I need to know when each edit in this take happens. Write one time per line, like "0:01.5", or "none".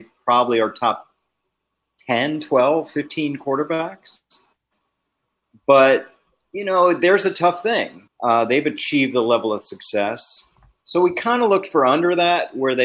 0:08.1

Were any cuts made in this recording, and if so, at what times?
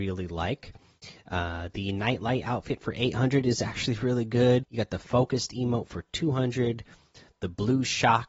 0:04.6

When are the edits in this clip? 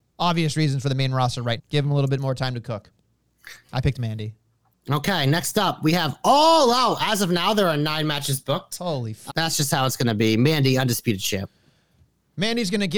0:01.6
0:03.6
0:09.3

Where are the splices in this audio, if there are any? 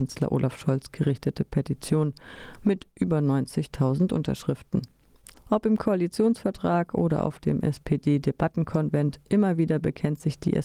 0:05.3

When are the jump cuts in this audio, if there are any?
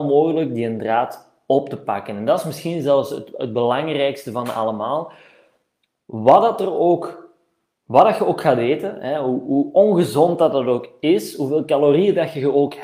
none

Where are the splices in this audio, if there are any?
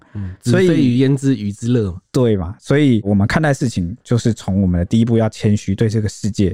none

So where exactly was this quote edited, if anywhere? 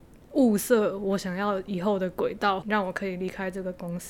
0:02.6

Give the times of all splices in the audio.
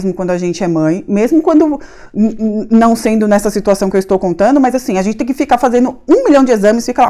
none

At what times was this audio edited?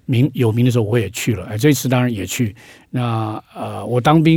none

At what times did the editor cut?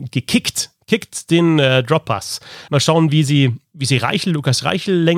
0:02.7

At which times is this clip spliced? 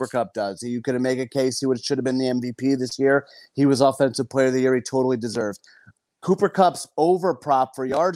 none

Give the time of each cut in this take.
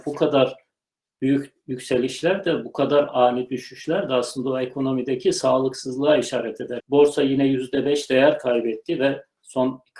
0:06.8

